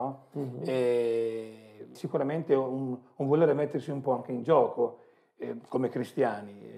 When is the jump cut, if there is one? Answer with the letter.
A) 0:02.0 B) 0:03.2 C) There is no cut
A